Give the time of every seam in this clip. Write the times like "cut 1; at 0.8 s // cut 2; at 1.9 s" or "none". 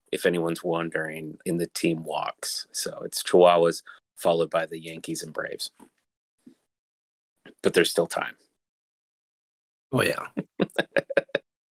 cut 1; at 1.4 s